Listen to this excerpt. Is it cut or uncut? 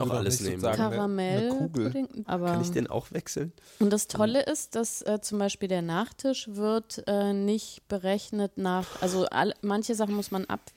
cut